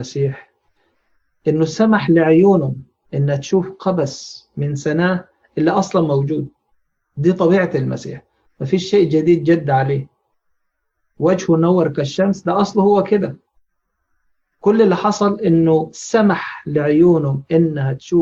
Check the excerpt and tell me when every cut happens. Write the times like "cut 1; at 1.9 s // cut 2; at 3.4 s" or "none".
none